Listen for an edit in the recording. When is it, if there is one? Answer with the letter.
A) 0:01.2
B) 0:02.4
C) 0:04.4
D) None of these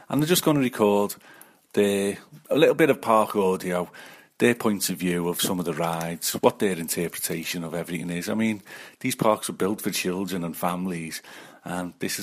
B